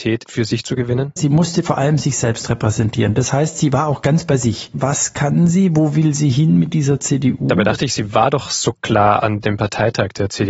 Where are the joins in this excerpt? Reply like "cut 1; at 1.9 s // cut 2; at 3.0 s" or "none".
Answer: cut 1; at 1.2 s // cut 2; at 4.7 s